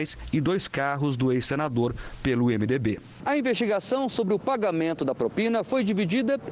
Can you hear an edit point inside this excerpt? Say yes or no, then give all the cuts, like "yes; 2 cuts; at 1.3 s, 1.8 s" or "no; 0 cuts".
no; 0 cuts